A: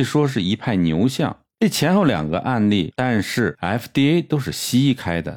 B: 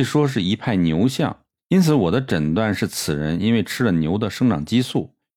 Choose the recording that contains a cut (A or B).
A